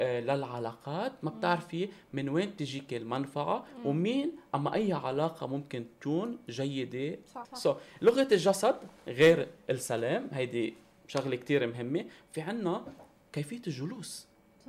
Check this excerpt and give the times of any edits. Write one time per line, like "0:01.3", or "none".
0:07.4